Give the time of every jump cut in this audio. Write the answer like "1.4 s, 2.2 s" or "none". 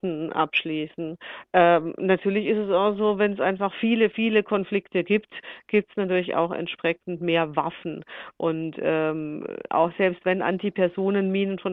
none